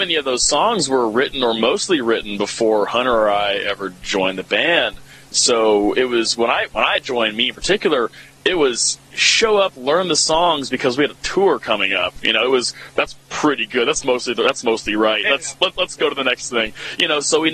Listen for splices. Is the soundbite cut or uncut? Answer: uncut